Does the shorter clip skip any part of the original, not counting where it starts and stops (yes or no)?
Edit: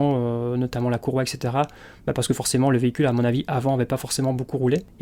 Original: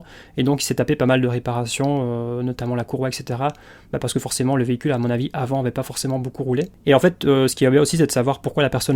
no